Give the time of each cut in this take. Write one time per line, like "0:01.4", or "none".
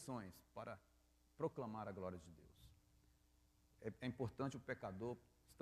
none